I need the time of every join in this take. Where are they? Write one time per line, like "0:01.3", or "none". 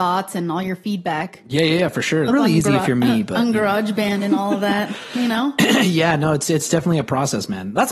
0:02.3